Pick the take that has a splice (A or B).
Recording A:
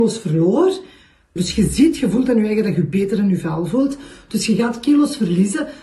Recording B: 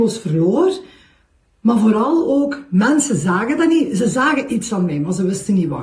A